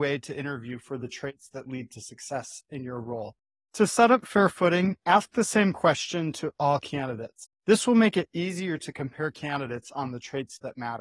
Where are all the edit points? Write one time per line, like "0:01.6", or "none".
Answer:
none

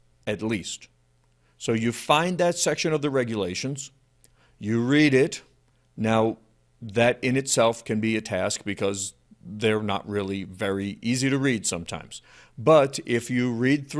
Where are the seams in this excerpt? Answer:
none

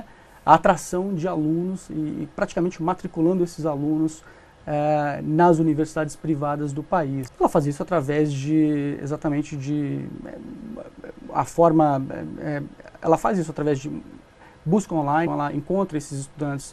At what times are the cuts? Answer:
0:07.3
0:15.3

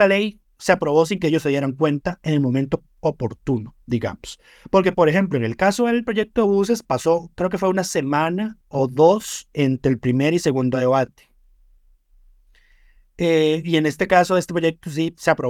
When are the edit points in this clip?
0:08.6

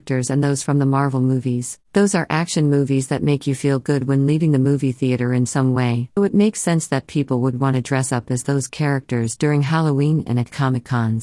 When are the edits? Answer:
0:01.8
0:06.2

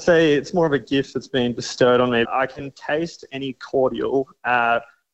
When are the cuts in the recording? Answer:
0:02.2

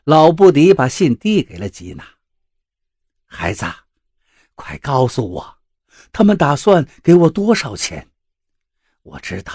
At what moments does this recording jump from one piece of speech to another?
none

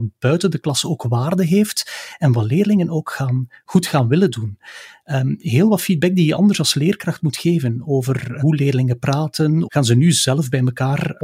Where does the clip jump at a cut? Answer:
0:09.7

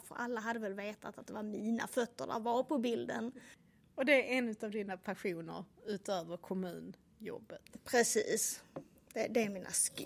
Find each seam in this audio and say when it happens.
none

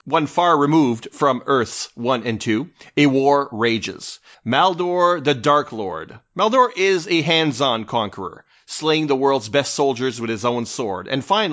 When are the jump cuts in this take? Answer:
0:04.3

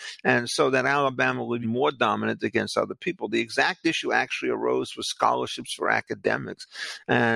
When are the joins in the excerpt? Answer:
0:01.6

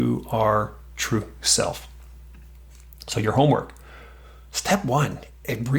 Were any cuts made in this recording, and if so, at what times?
none

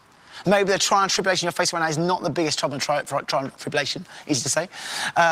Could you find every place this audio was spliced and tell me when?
none

